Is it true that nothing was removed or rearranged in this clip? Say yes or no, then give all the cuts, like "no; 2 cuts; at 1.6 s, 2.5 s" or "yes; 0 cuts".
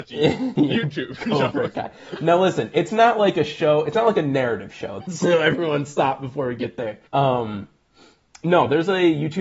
no; 2 cuts; at 5.0 s, 7.1 s